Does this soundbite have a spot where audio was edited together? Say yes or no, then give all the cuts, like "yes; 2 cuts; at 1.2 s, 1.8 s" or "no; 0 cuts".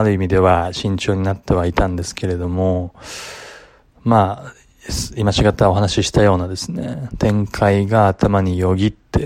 no; 0 cuts